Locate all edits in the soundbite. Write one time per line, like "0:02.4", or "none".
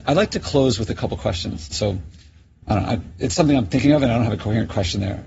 0:01.7